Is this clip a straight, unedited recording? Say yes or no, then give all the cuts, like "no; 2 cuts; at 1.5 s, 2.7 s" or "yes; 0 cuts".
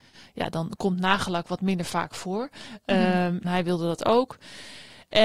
no; 1 cut; at 3.4 s